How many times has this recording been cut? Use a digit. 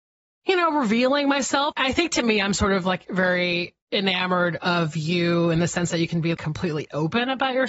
3